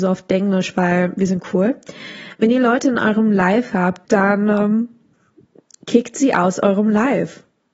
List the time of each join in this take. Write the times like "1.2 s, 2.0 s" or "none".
4.0 s